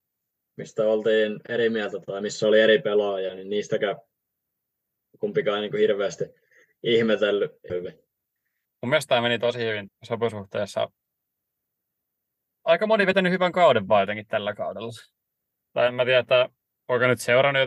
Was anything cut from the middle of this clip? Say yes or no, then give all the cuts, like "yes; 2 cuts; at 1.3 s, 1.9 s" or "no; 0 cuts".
yes; 2 cuts; at 7.7 s, 9.9 s